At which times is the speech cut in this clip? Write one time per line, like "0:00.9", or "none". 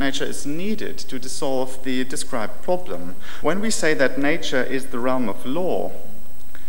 0:03.4

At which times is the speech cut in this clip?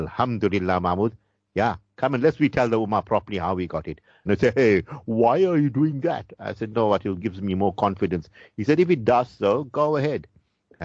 0:04.3

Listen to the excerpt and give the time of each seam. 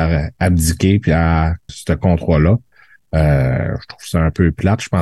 0:01.7

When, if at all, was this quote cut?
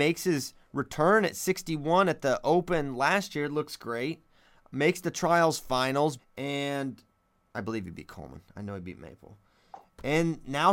0:06.2

